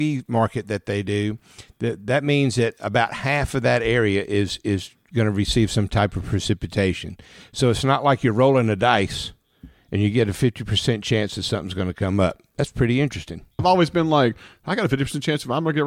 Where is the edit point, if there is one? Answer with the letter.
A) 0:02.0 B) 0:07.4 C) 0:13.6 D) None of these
C